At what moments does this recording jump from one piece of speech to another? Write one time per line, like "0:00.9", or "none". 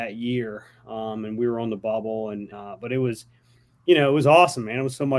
0:02.5